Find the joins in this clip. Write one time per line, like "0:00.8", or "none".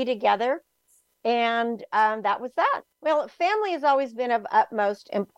0:02.9